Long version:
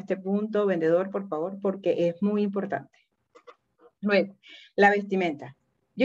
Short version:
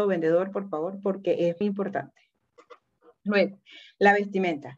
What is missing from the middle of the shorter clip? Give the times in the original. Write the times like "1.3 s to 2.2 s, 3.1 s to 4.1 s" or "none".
2.2 s to 2.4 s